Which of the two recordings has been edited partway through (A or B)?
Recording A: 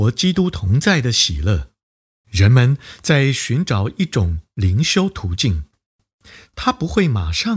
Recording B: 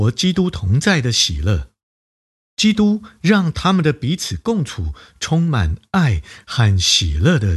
A